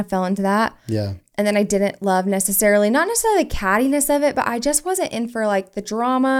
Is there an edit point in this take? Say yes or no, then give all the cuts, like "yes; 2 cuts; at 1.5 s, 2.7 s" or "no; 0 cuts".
no; 0 cuts